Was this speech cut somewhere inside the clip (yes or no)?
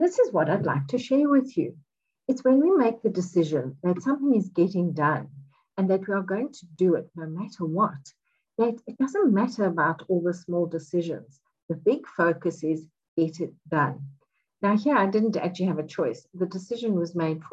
no